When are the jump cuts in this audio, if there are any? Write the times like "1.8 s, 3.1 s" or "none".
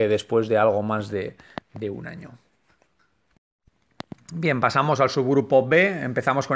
none